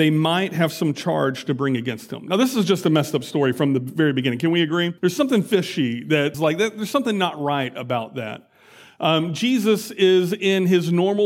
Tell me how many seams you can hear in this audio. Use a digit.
2